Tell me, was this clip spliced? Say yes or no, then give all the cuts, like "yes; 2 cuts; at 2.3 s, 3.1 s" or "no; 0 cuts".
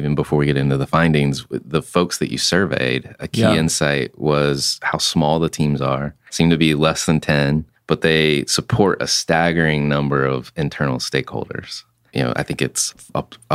no; 0 cuts